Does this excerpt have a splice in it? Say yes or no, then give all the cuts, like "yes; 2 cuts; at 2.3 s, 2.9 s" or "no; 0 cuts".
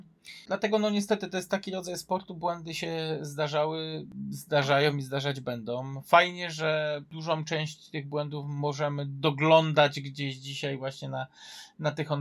no; 0 cuts